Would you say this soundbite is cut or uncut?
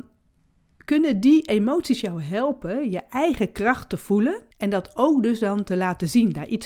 cut